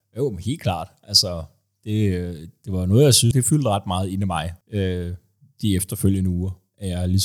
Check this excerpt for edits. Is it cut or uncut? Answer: cut